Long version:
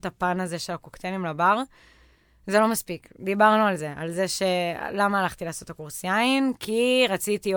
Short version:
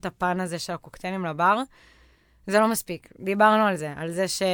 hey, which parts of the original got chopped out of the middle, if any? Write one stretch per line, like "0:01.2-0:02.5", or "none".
none